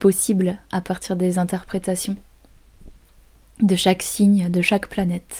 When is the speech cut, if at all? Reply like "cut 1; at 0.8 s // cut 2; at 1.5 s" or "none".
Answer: none